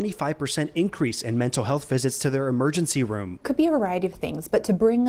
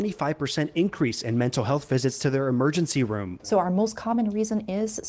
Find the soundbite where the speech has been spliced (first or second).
second